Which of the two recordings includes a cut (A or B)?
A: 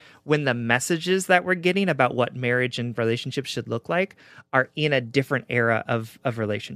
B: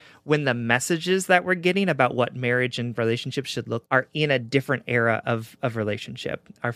B